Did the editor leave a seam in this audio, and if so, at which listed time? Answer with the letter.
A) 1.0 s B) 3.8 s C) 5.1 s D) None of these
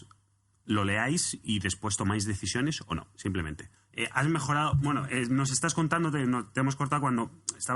B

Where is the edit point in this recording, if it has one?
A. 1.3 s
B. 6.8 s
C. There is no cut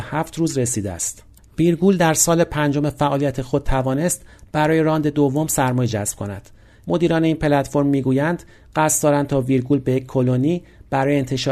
B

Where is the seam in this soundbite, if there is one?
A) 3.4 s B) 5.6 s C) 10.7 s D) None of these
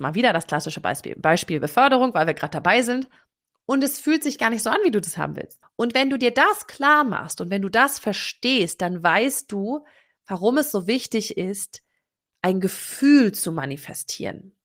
B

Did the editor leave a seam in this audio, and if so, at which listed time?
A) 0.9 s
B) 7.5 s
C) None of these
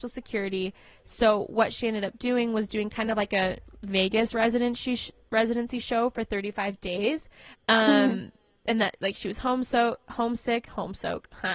B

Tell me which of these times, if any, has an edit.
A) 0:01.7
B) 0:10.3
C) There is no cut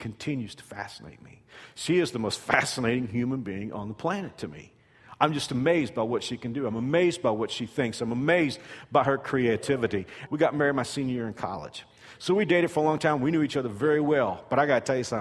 B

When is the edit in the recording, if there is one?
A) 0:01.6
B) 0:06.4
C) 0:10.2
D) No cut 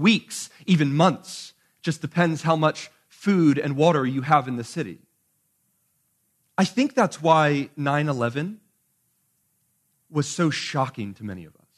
B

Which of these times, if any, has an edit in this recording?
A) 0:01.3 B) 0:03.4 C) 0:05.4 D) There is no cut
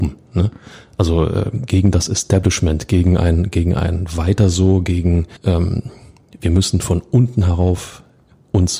C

